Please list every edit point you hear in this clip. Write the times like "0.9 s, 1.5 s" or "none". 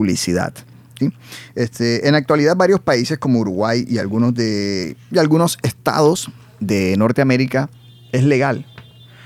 1.0 s